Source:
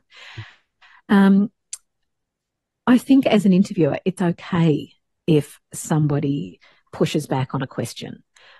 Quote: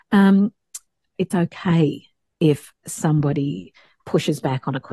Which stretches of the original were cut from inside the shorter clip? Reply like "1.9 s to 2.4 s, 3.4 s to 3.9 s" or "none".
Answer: 2.1 s to 4.0 s